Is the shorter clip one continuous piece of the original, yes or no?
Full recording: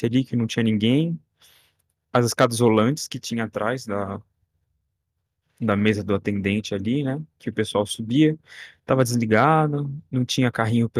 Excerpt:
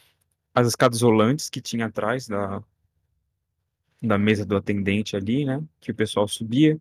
yes